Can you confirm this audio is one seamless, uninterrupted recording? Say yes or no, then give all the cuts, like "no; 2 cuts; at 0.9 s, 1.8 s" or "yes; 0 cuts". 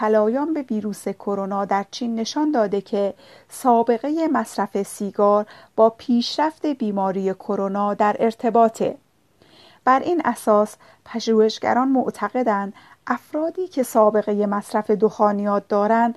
yes; 0 cuts